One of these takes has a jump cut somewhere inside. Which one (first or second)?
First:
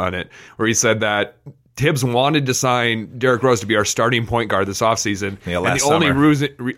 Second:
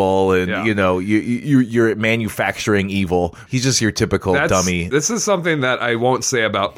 second